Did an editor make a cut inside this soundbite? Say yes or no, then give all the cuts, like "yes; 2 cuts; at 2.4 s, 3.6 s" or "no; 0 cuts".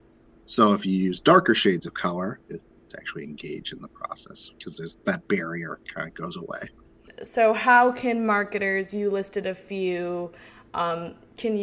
yes; 1 cut; at 2.5 s